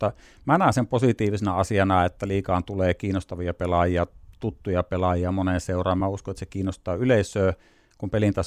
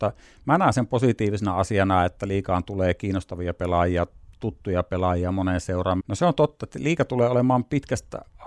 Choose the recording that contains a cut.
second; 1 cut; at 6.0 s

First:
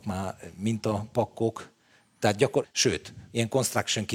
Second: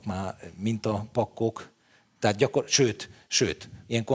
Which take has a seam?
first; 1 cut; at 2.6 s

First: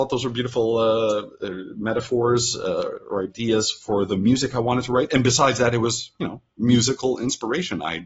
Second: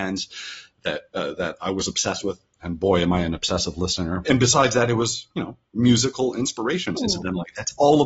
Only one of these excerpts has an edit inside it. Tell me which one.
second; 2 cuts; at 4.2 s, 7.0 s

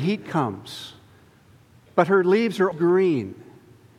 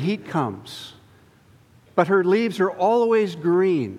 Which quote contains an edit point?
first; 1 cut; at 2.7 s

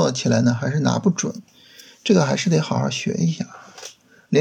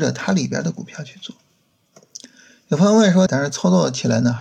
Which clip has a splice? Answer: second; 1 cut; at 3.3 s

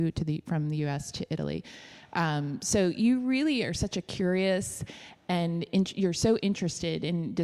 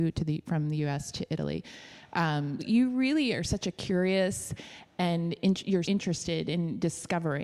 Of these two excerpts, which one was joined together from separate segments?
second; 2 cuts; at 2.6 s, 5.8 s

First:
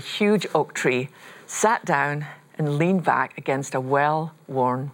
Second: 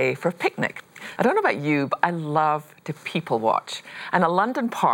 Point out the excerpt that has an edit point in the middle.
second; 1 cut; at 1.2 s

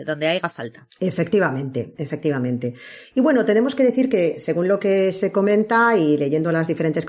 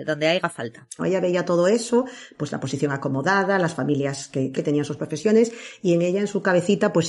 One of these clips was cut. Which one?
second; 2 cuts; at 1.0 s, 4.5 s

